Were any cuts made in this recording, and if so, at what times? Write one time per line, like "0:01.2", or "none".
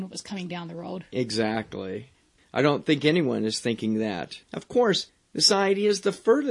0:02.4
0:04.4